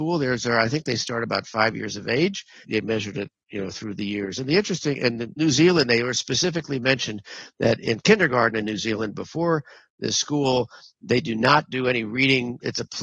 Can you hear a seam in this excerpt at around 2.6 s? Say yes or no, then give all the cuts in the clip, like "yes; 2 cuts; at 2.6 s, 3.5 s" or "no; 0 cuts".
yes; 1 cut; at 2.6 s